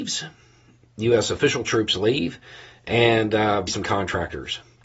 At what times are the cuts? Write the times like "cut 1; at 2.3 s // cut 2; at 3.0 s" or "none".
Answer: cut 1; at 3.7 s